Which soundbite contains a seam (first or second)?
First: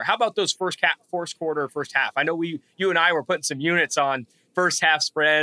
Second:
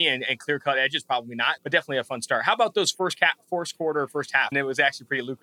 second